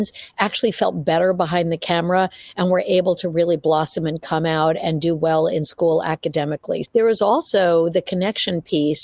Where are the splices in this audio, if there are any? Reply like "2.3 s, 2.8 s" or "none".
6.8 s